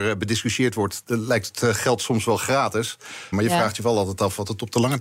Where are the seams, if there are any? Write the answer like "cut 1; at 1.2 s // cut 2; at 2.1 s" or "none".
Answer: cut 1; at 1.0 s // cut 2; at 3.3 s